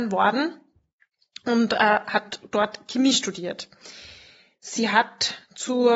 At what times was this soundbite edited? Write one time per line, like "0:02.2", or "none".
none